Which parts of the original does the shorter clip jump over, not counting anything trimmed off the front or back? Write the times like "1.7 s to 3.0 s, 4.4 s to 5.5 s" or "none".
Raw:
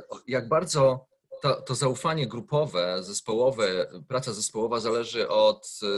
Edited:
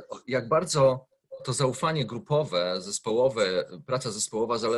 1.4 s to 1.6 s

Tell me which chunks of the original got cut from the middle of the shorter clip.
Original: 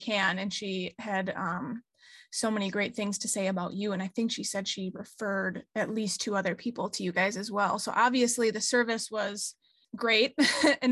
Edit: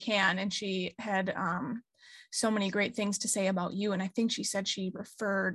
none

